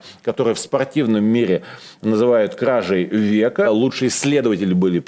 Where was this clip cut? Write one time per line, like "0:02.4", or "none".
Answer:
0:03.6